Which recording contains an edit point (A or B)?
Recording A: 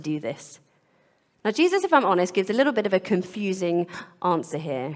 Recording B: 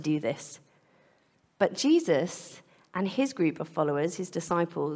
A